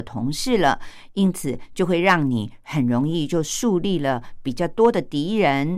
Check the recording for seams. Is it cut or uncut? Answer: uncut